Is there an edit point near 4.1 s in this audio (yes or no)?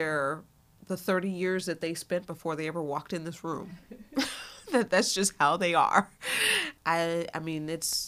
no